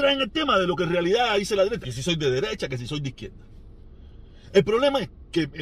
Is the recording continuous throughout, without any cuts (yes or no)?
no